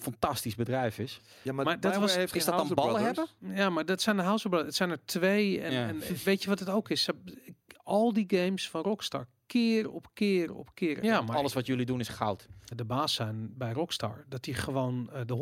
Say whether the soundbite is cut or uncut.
cut